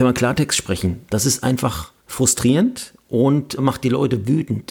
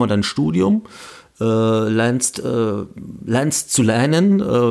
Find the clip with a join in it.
first; 2 cuts; at 2.0 s, 3.6 s

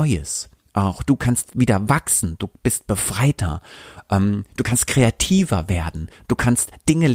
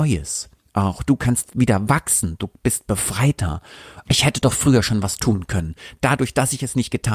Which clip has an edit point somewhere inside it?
second; 1 cut; at 4.0 s

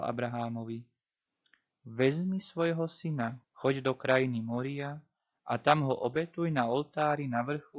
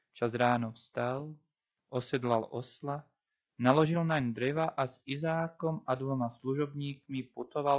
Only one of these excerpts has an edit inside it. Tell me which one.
first; 1 cut; at 3.4 s

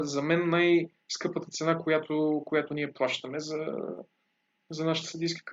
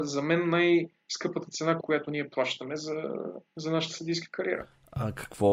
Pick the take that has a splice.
second; 2 cuts; at 1.8 s, 3.5 s

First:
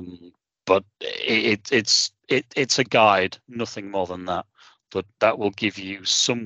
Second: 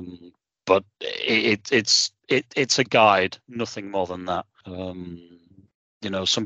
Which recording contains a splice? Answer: second; 1 cut; at 4.6 s

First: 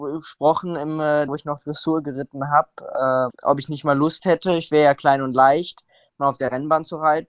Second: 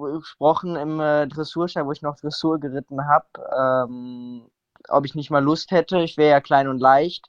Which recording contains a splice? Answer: first; 2 cuts; at 1.3 s, 3.3 s

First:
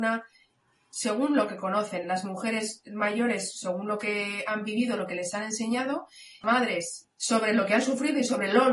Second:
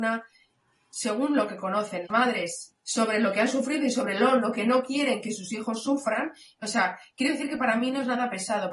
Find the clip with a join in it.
second; 2 cuts; at 2.0 s, 6.6 s

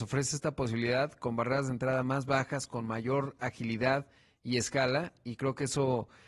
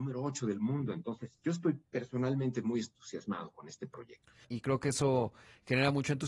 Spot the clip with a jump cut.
second; 1 cut; at 4.4 s

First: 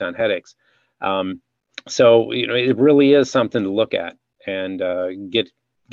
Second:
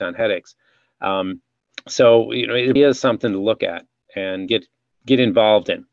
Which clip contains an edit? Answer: second; 2 cuts; at 2.8 s, 4.5 s

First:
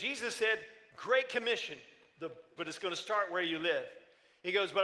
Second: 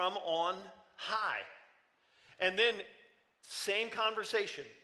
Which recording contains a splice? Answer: first; 1 cut; at 2.6 s

